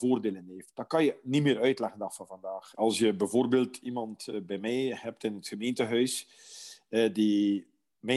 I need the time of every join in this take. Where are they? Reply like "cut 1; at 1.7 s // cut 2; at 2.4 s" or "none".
cut 1; at 2.7 s

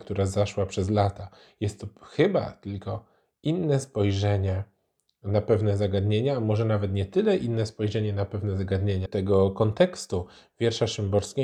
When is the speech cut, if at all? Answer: cut 1; at 9.1 s

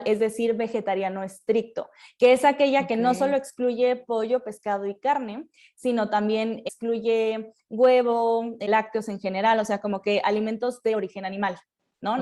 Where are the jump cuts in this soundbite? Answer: none

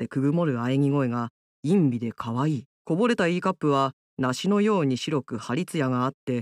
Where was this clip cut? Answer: cut 1; at 2.7 s

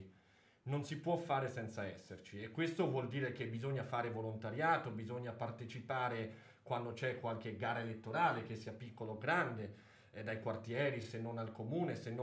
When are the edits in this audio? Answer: none

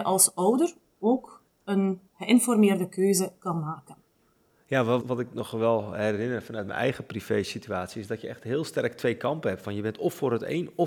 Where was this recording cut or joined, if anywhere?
cut 1; at 5.0 s

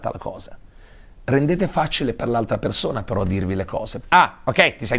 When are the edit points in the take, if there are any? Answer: cut 1; at 4.0 s

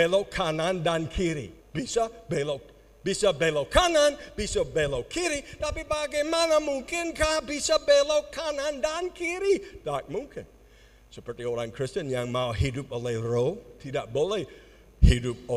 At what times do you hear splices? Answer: cut 1; at 1.6 s

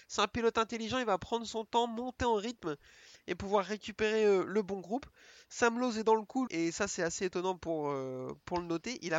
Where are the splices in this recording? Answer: cut 1; at 6.5 s

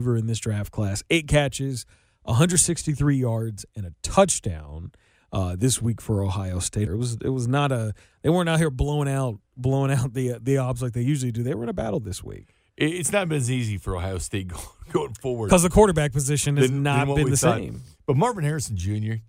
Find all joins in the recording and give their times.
cut 1; at 6.9 s

